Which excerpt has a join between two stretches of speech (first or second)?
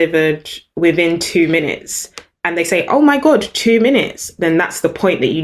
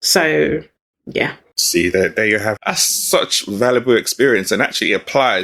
second